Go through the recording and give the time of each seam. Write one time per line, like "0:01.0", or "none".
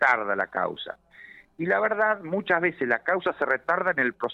none